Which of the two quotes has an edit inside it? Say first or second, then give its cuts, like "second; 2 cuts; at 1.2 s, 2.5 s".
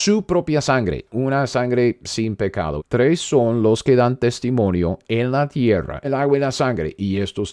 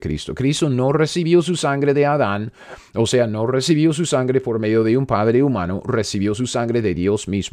first; 3 cuts; at 1.1 s, 2.8 s, 6.0 s